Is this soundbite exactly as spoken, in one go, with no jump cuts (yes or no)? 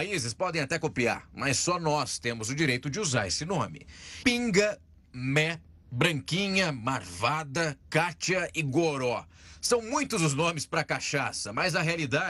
no